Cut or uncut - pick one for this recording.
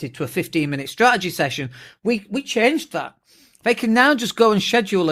uncut